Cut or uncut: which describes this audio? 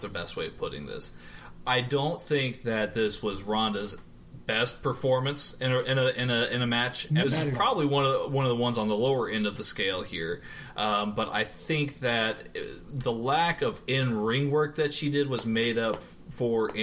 cut